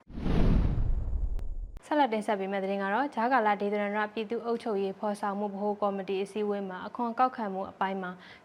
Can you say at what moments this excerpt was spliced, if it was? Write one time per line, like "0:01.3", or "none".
0:01.8